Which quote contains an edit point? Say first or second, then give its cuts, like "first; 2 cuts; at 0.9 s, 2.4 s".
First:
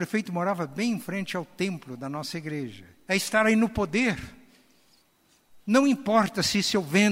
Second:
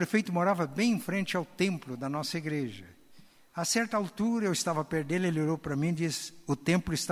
first; 1 cut; at 3.1 s